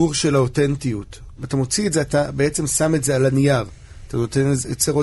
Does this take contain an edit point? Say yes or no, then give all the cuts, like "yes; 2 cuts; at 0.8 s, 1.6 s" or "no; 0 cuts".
yes; 1 cut; at 1.4 s